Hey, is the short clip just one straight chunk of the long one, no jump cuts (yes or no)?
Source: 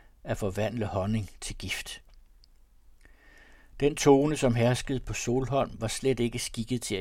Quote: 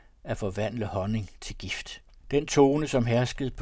no